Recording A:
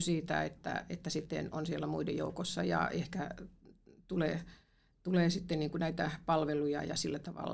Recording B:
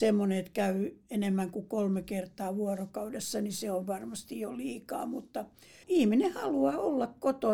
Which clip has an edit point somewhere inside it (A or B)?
B